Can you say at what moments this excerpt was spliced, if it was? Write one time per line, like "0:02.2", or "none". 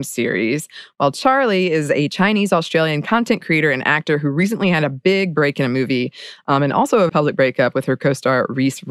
0:07.1